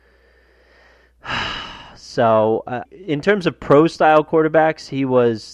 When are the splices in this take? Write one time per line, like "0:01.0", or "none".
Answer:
0:02.9